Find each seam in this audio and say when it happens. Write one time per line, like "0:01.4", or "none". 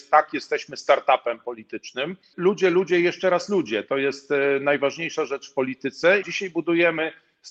0:02.3
0:06.2